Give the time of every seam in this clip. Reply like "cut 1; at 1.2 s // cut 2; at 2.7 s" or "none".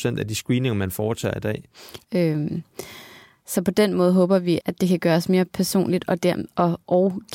cut 1; at 2.0 s // cut 2; at 4.6 s